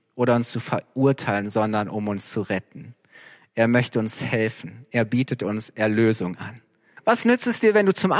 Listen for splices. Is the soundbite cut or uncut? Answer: cut